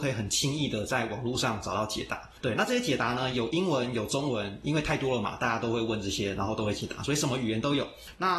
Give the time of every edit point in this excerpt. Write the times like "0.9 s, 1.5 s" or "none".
none